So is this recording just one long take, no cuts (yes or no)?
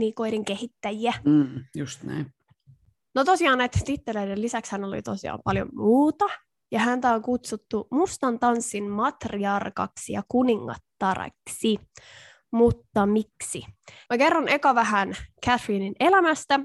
no